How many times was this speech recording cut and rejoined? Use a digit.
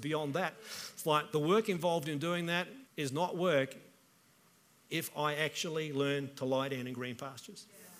1